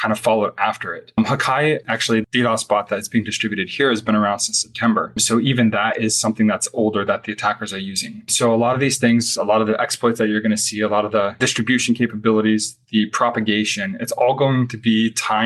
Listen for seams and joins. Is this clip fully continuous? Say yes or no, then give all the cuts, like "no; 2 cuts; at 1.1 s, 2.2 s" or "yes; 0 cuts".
yes; 0 cuts